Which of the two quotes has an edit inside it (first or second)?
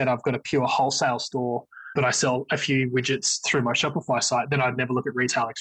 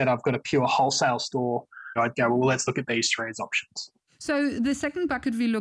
second